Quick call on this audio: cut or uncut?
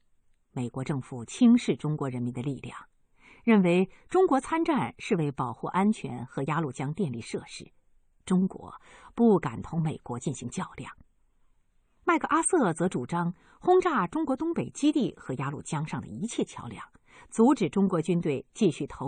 uncut